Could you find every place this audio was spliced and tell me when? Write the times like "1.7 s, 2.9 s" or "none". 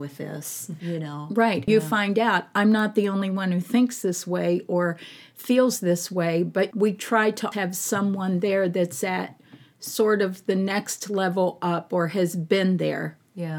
1.7 s, 7.5 s

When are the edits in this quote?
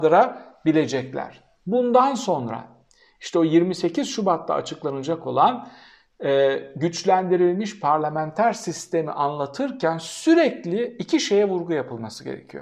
none

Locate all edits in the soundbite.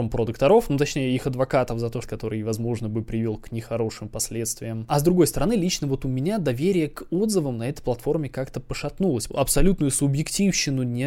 2.0 s, 9.3 s

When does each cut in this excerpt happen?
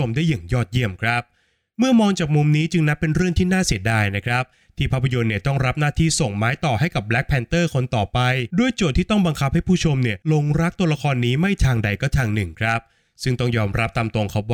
8.5 s, 10.2 s

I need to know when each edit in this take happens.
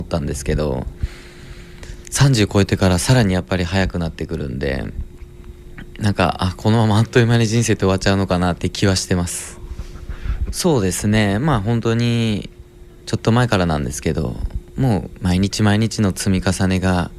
10.5 s

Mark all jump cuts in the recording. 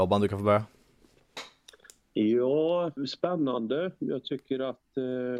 3.0 s

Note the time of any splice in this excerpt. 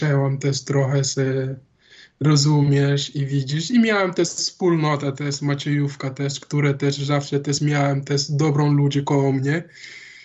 none

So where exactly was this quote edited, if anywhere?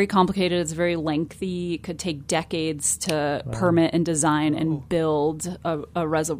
none

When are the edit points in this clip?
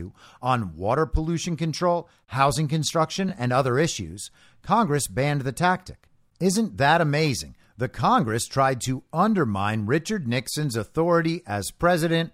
none

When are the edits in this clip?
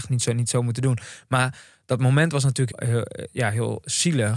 2.7 s

